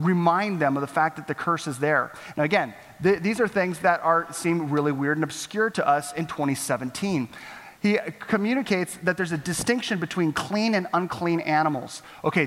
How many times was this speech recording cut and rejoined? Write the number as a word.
one